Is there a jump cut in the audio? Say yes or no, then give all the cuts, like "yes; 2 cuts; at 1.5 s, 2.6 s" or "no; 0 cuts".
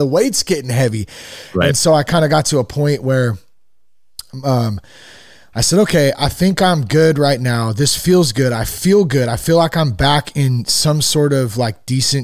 no; 0 cuts